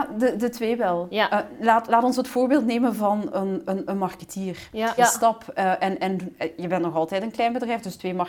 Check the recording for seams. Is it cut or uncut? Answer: cut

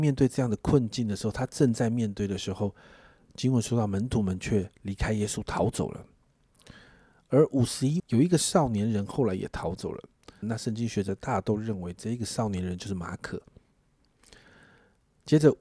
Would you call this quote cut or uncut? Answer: cut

